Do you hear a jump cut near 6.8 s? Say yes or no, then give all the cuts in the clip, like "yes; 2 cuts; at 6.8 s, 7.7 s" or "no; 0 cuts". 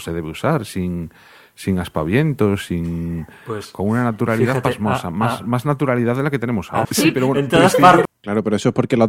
yes; 2 cuts; at 6.8 s, 8.1 s